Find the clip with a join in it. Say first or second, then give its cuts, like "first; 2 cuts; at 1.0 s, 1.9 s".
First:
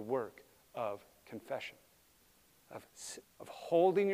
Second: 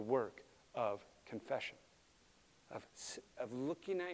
first; 1 cut; at 3.2 s